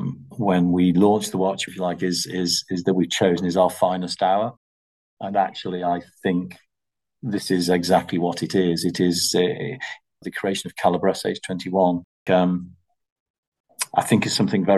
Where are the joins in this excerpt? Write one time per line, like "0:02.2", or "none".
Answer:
0:01.7
0:10.2
0:12.3